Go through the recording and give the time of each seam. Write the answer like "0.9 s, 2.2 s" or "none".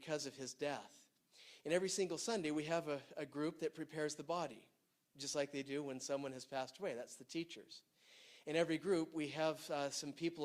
none